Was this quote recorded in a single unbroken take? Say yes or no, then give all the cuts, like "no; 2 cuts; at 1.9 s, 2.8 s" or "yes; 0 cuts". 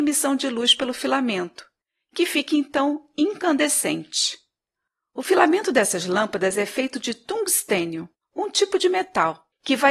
yes; 0 cuts